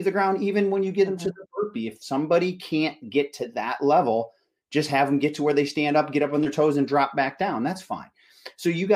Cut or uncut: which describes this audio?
uncut